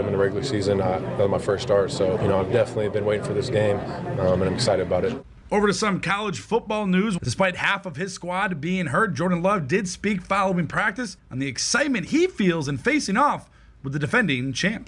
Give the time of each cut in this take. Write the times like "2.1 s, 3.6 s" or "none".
2.2 s, 7.2 s